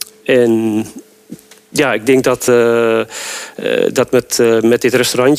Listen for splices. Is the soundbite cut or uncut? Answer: uncut